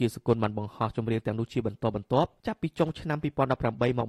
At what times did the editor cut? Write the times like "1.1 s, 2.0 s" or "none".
2.4 s